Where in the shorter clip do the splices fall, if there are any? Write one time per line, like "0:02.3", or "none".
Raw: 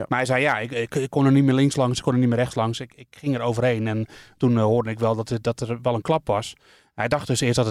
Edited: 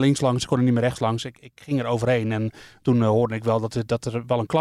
none